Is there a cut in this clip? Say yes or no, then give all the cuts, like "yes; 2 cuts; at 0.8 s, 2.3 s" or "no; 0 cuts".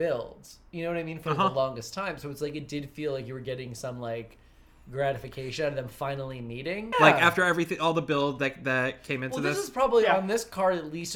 yes; 1 cut; at 6.9 s